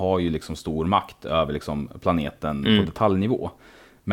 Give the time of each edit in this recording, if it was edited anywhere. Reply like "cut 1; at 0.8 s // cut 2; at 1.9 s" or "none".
none